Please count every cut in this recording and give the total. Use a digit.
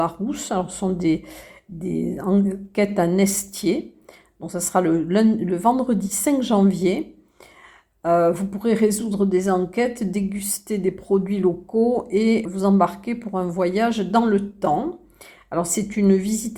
1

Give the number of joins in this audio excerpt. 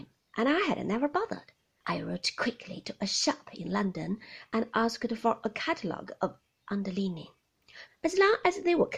2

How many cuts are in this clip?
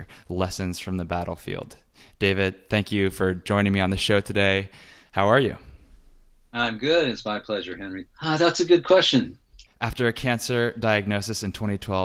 2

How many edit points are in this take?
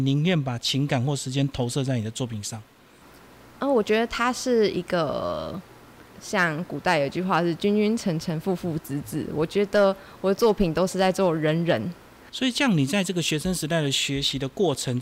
2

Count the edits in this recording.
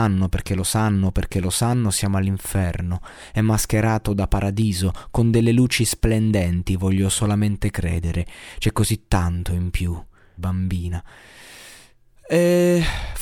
1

